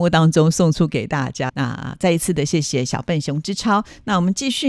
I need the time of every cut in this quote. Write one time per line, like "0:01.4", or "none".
0:01.5

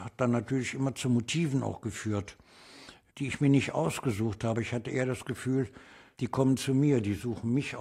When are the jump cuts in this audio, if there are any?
none

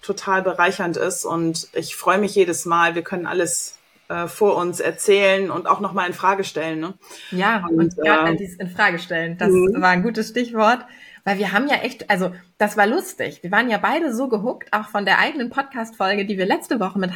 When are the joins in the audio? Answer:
none

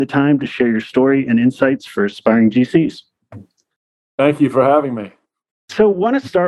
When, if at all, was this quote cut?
none

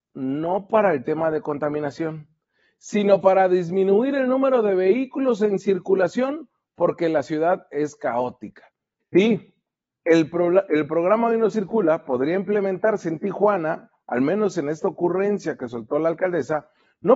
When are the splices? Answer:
0:09.0

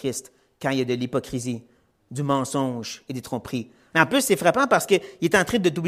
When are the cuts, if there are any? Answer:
0:03.9

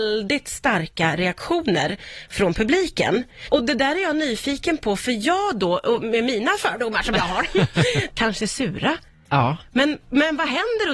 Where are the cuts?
0:03.5
0:08.1

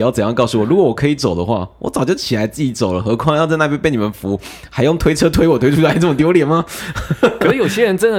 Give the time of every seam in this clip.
none

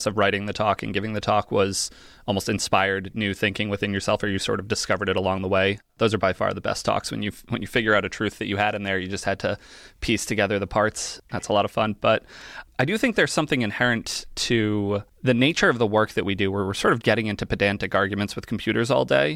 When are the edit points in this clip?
0:17.0

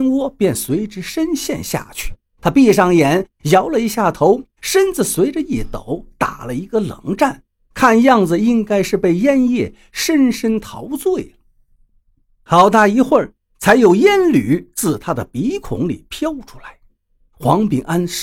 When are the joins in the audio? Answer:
none

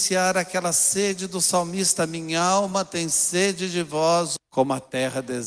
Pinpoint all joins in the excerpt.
0:04.4

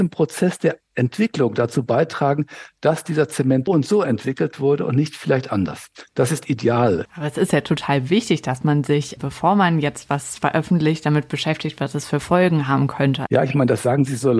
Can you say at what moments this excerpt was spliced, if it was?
0:03.7
0:07.1
0:13.3

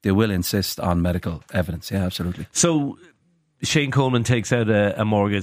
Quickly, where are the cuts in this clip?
none

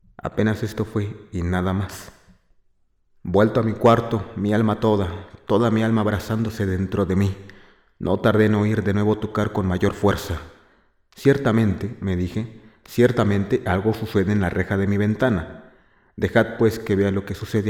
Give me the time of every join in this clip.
none

